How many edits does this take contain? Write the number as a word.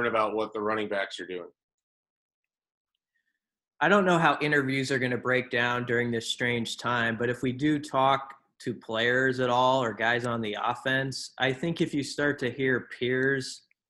zero